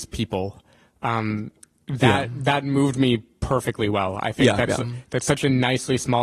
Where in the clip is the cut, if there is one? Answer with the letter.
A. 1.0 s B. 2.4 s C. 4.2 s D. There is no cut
D